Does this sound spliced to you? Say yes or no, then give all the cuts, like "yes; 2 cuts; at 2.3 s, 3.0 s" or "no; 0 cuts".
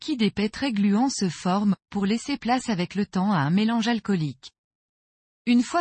yes; 1 cut; at 1.8 s